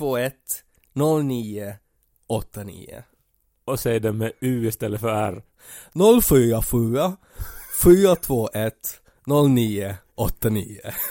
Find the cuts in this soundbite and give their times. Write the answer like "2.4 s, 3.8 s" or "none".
none